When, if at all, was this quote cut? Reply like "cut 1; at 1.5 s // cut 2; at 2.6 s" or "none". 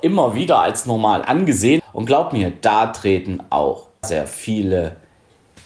cut 1; at 1.8 s // cut 2; at 4.0 s

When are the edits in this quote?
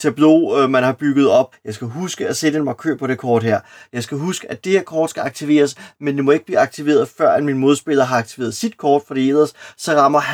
cut 1; at 1.5 s

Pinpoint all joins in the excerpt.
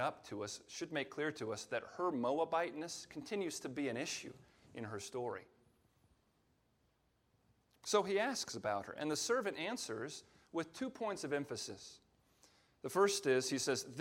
none

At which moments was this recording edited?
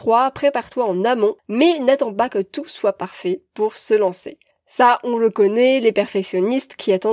none

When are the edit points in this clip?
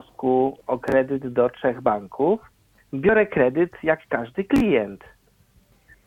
cut 1; at 2.8 s

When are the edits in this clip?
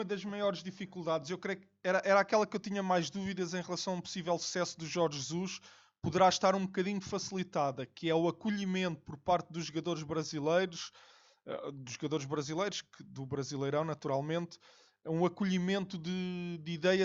none

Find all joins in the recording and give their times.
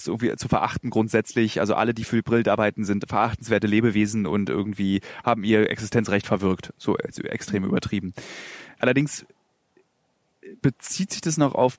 cut 1; at 8.8 s

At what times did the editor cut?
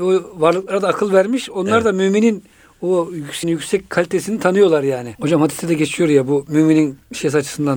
cut 1; at 3.4 s // cut 2; at 5.1 s

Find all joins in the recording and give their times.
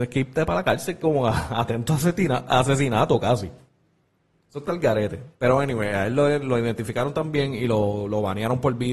none

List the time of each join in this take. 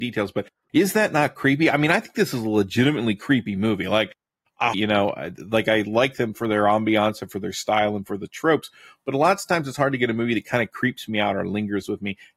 cut 1; at 4.7 s

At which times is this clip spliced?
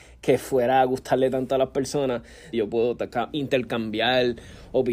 cut 1; at 2.5 s

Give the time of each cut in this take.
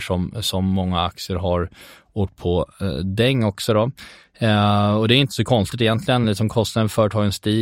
none

